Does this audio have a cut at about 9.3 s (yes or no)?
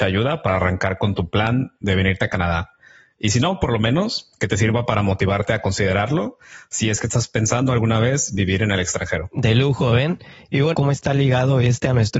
no